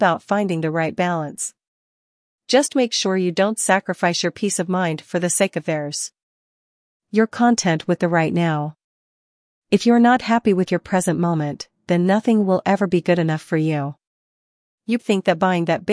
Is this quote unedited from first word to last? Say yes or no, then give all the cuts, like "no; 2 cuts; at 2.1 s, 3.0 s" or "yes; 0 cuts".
no; 1 cut; at 15.0 s